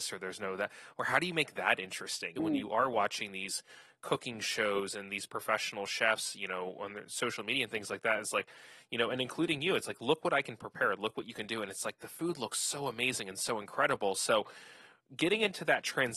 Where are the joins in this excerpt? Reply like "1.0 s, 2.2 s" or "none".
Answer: 2.4 s